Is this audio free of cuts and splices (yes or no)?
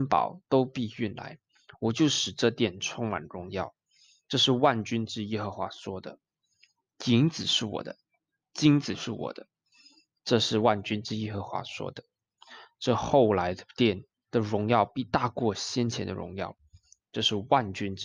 yes